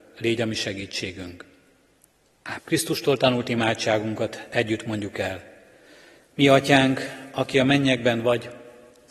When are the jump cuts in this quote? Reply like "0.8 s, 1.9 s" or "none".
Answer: 2.6 s